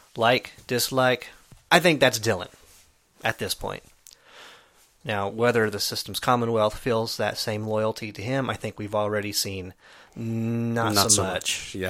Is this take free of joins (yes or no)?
no